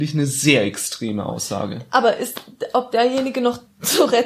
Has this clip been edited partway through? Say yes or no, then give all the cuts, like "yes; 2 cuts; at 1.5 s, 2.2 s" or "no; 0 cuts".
yes; 1 cut; at 2.7 s